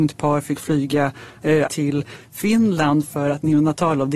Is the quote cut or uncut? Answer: cut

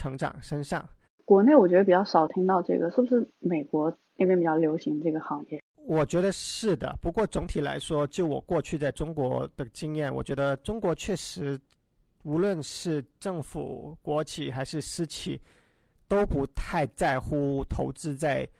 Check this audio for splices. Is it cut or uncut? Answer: cut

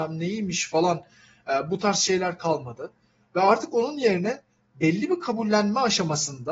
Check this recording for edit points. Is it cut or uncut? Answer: uncut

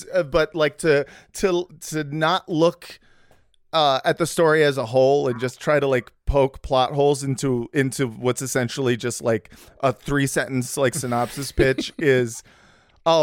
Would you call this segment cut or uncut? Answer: uncut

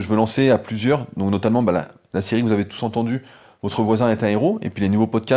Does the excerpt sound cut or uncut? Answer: uncut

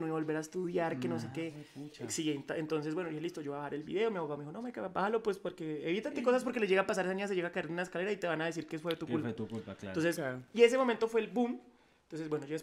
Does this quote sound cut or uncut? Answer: uncut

